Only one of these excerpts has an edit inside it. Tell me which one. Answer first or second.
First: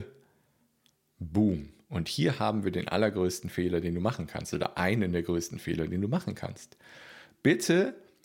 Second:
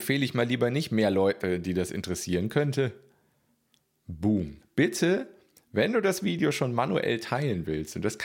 second